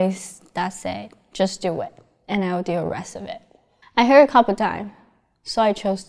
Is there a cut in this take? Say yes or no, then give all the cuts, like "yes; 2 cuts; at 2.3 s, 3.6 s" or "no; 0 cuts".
yes; 1 cut; at 3.8 s